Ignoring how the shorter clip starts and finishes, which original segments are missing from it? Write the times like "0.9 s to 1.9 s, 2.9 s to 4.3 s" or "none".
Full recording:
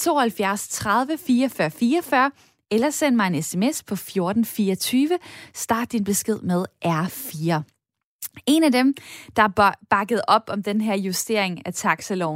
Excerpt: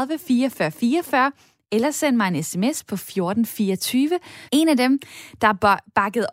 5.5 s to 8.4 s